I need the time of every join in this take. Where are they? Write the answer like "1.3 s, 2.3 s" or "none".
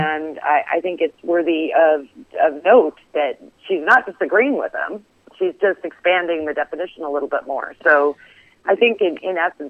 none